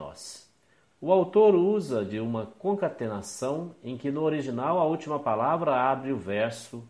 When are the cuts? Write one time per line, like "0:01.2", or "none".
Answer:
0:00.9